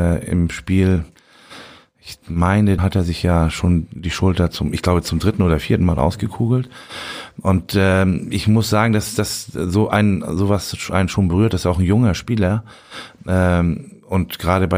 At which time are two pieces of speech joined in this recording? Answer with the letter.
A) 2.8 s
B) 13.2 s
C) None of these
A